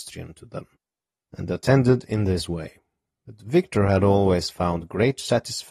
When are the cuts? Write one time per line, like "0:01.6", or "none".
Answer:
0:01.2